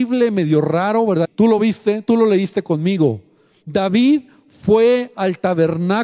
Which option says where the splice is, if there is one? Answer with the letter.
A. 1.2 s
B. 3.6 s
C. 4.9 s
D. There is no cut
A